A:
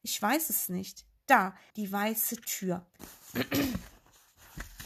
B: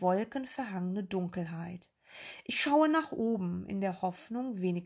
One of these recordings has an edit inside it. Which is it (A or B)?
A